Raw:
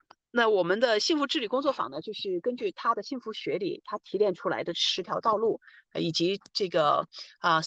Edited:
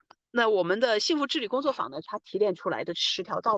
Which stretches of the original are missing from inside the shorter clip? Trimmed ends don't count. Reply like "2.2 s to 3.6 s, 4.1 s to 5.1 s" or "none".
2.0 s to 3.8 s